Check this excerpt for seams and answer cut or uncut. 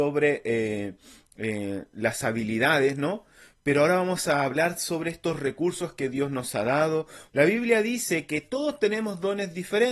cut